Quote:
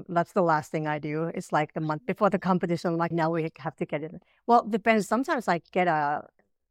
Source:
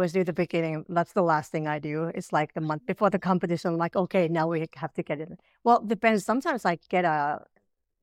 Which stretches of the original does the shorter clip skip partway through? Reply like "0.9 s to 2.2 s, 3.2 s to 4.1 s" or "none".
3.9 s to 4.3 s